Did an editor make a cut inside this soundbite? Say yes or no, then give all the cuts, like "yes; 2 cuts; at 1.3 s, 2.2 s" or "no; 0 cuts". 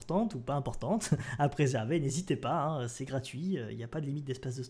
no; 0 cuts